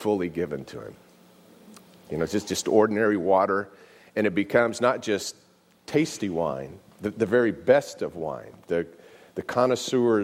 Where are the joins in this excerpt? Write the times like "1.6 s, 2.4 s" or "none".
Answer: none

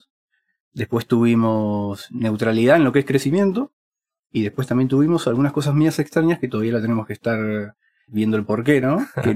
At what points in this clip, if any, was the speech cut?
8.1 s

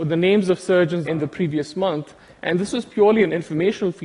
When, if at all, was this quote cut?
1.1 s

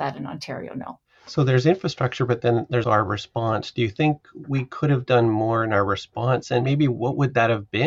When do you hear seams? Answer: 2.8 s

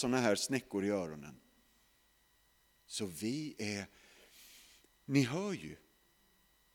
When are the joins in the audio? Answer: none

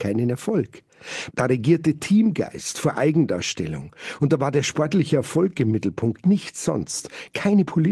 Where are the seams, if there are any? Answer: 1.3 s

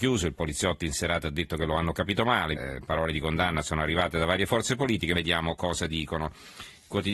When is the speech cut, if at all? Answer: 2.5 s, 5.1 s

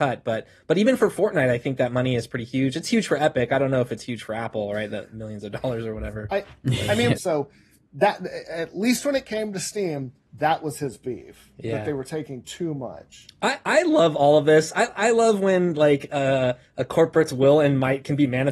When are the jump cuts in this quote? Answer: 7.2 s

